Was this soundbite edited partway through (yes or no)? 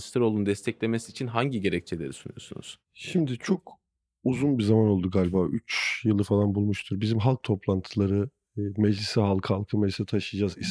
no